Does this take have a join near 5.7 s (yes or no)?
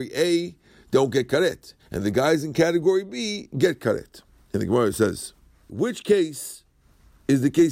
yes